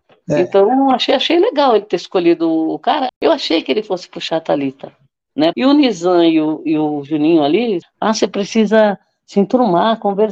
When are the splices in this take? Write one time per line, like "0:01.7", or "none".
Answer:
0:03.1
0:05.5
0:07.8

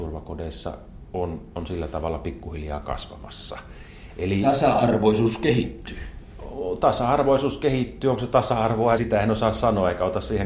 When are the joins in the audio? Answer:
0:09.0

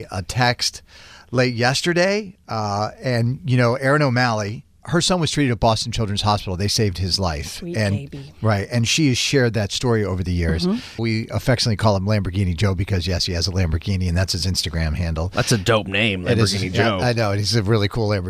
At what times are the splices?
0:04.8
0:11.0

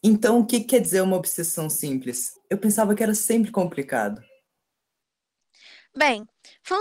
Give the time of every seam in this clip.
0:02.4

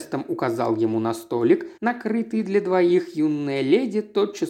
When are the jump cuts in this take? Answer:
0:01.8

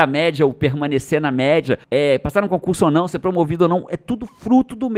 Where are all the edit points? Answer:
0:01.8

